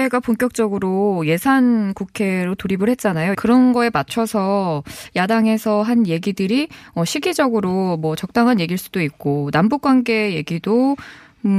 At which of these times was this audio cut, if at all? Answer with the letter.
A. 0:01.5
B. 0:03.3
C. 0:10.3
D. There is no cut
B